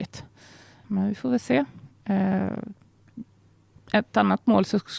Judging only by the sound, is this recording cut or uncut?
uncut